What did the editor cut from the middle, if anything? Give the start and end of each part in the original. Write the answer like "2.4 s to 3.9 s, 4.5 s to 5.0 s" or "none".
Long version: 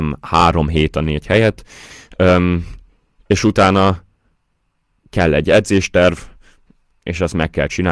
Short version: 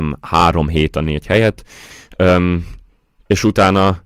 none

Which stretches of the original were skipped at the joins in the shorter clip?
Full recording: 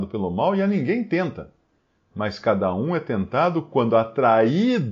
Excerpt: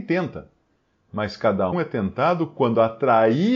2.7 s to 2.9 s

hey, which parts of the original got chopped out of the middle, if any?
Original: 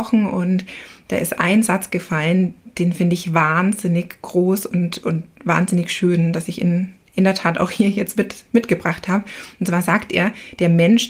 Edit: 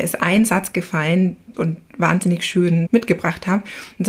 2.7 s to 5.0 s, 6.3 s to 8.5 s

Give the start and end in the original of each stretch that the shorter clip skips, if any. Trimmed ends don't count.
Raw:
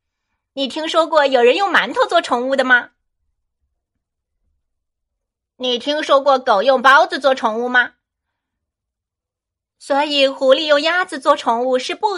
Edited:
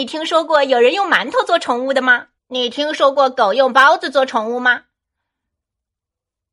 3.0 s to 5.5 s

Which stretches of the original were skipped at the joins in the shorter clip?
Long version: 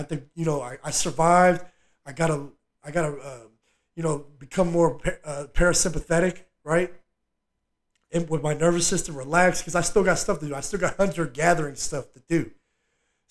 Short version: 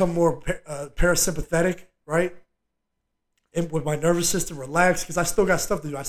none

